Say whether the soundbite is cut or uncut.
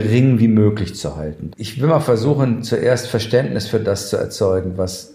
cut